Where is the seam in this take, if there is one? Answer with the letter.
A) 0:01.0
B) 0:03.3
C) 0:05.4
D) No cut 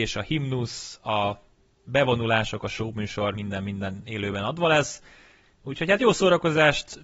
B